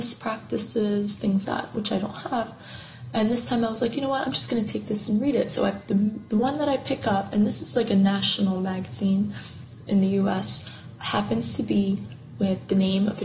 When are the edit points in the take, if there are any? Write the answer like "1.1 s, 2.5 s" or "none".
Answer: 1.4 s